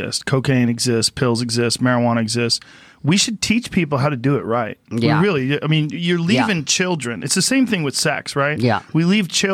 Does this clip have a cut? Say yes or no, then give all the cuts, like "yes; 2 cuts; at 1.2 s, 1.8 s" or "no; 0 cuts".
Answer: no; 0 cuts